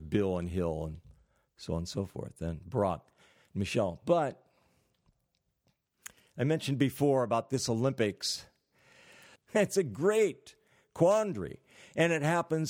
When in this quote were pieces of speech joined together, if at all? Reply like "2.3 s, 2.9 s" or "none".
9.4 s